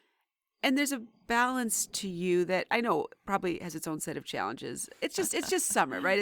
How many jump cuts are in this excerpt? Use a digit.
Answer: 1